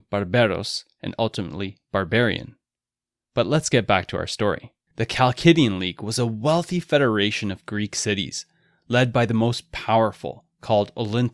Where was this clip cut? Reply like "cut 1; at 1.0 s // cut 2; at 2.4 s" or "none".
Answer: cut 1; at 4.9 s